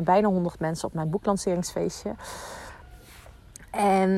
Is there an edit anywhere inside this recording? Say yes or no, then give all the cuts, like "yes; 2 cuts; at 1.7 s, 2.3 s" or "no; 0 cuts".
no; 0 cuts